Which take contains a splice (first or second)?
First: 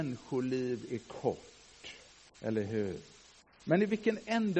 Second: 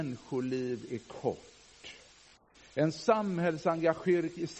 first